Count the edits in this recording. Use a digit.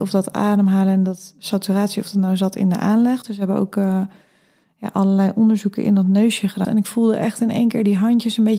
2